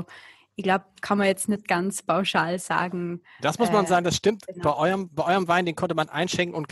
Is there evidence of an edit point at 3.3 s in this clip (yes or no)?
no